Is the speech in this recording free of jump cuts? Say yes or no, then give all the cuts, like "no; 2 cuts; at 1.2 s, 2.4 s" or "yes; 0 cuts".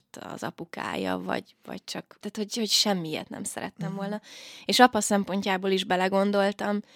yes; 0 cuts